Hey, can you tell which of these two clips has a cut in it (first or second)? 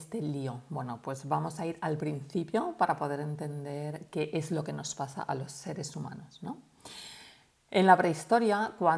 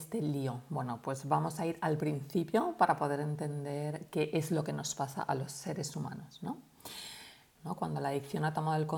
second